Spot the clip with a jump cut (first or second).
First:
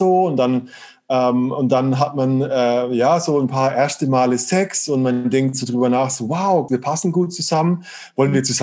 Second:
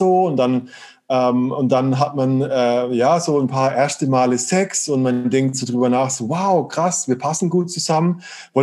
first